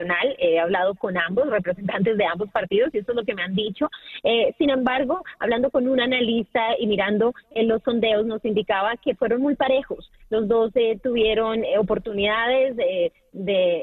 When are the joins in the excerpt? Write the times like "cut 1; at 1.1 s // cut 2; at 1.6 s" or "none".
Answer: none